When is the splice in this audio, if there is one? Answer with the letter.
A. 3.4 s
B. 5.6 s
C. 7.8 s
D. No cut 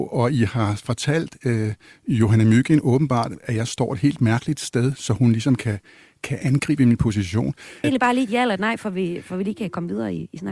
C